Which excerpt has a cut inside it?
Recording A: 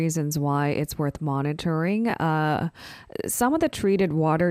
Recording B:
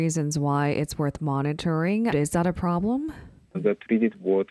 B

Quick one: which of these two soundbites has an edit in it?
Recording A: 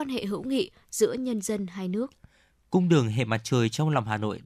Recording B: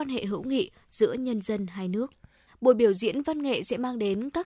B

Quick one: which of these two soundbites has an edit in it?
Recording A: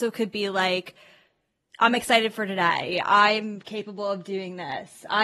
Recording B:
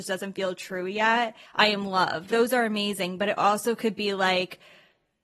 B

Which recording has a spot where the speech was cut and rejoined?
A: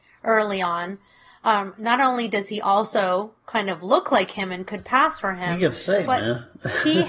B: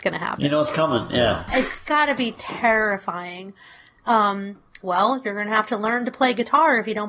B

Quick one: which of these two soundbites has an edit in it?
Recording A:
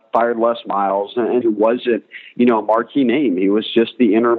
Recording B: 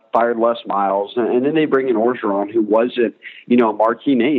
A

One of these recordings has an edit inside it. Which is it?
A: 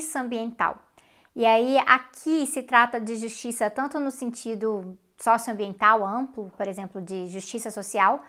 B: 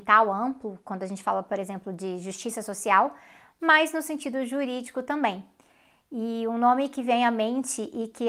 A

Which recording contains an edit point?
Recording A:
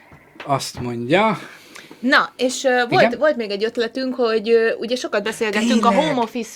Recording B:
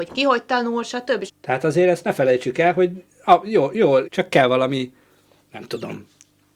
B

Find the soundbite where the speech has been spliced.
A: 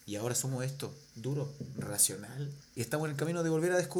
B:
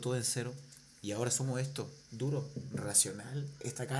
A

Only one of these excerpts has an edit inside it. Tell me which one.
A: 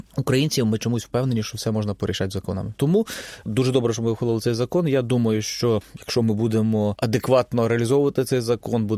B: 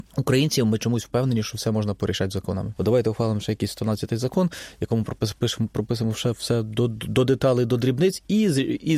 A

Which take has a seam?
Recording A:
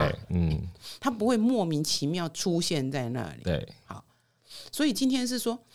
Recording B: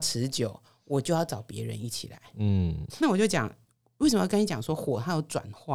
B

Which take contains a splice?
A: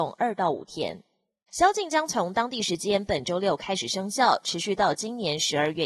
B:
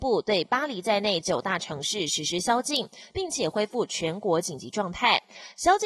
A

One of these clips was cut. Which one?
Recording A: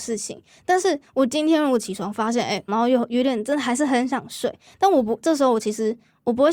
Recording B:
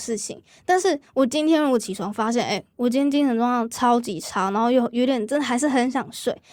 A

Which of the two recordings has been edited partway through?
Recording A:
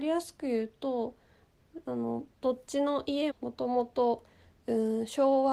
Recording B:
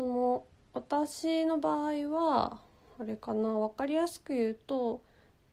A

